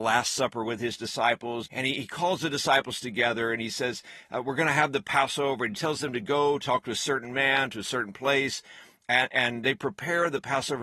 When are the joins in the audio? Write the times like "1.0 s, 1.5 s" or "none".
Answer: 1.7 s